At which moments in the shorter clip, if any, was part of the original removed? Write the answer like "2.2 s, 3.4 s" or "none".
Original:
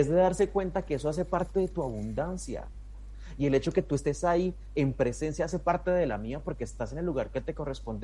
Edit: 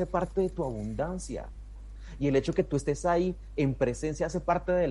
none

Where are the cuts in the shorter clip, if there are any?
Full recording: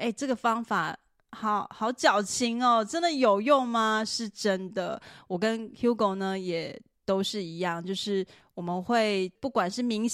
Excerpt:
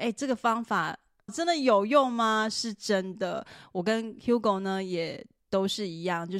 1.3 s

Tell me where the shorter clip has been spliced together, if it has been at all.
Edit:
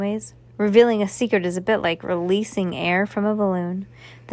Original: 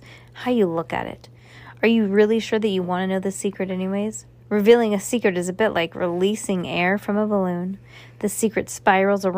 none

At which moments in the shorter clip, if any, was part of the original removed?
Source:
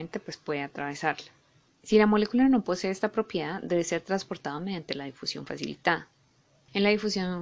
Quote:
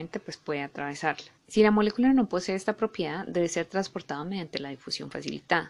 1.4 s

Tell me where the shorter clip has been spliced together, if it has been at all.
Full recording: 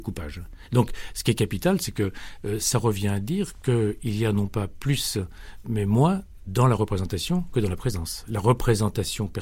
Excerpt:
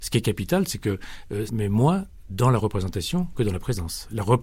1.5 s

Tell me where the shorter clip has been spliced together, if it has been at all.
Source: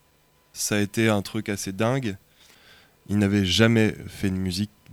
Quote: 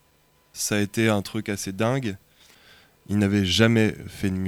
none

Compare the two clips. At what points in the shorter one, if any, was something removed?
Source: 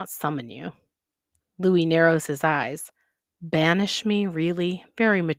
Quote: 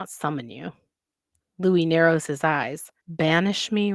3.0 s

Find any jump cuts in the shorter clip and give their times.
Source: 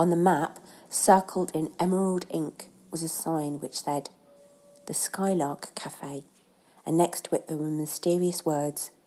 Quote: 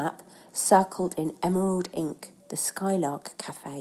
2.4 s

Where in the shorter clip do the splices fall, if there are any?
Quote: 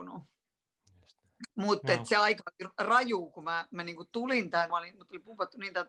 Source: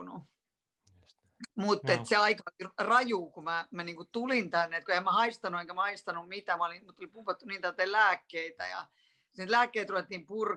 4.7 s

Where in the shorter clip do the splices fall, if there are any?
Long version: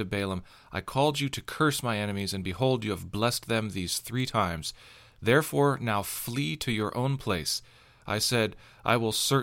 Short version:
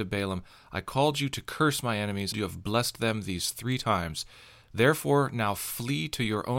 2.3 s

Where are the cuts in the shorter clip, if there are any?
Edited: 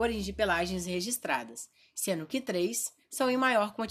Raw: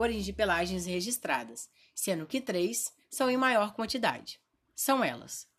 none

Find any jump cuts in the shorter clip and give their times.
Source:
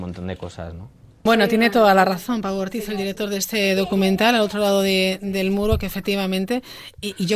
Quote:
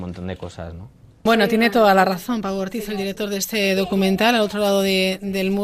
none

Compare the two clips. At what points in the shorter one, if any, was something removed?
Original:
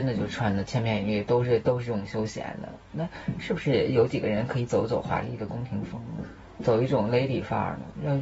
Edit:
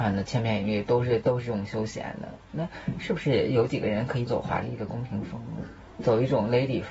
4.3 s

